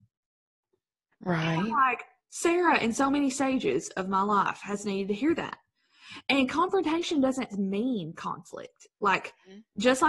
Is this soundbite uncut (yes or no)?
no